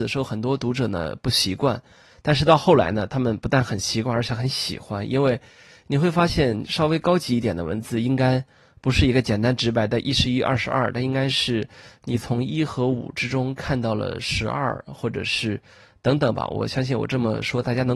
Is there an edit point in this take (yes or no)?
no